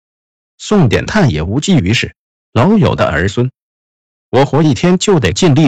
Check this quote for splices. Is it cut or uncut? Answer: cut